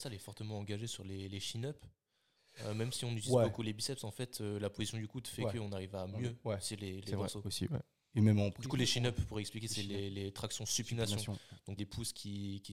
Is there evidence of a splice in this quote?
yes; 1 cut; at 11.8 s

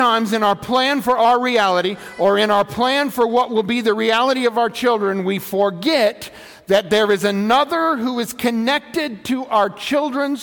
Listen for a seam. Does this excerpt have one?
no; 0 cuts

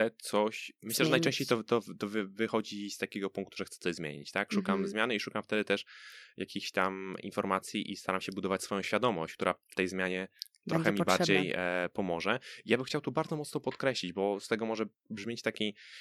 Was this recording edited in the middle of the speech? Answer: no; 0 cuts

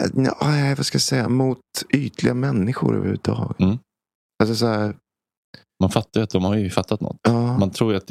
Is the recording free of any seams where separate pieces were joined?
yes; 0 cuts

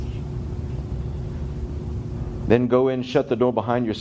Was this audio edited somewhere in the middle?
no; 0 cuts

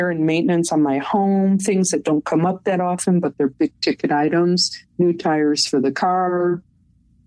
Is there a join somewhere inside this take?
no; 0 cuts

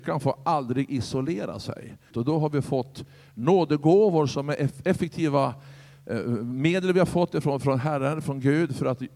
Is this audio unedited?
no; 1 cut; at 2.1 s

